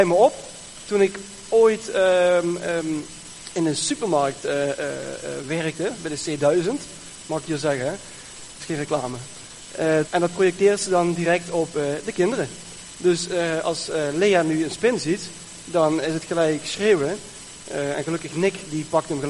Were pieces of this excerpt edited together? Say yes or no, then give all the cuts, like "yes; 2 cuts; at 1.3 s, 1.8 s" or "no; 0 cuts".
yes; 1 cut; at 10.1 s